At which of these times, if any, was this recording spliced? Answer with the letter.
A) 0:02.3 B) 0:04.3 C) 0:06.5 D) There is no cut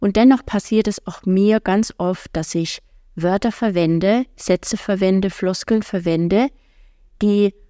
D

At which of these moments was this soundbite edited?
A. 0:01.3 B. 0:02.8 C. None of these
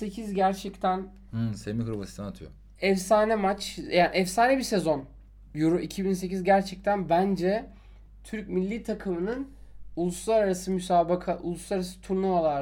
B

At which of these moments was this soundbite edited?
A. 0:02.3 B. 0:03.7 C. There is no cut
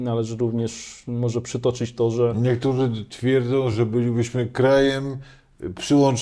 C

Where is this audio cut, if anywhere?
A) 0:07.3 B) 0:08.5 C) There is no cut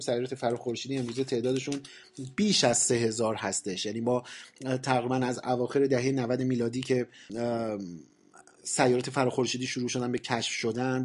A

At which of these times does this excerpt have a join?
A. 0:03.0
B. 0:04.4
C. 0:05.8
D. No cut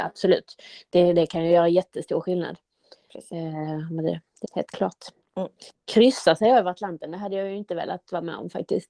B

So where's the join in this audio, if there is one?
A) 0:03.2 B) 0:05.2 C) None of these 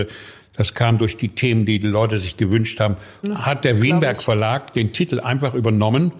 A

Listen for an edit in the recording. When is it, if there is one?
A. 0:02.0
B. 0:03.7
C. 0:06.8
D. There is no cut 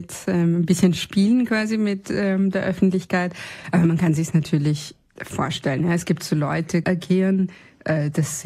C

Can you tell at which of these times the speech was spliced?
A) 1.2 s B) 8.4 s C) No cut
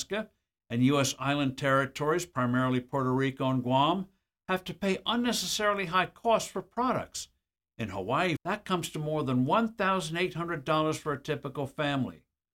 B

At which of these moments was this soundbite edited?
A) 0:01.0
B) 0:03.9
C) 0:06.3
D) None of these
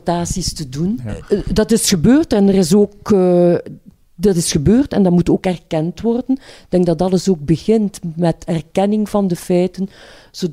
A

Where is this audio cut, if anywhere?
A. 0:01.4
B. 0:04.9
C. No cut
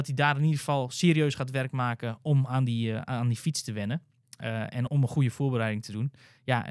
B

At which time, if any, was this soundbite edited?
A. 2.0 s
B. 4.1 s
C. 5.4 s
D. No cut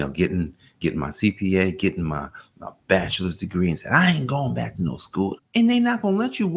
C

